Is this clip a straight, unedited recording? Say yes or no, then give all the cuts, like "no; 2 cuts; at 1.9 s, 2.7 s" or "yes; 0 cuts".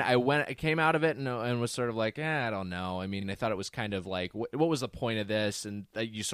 yes; 0 cuts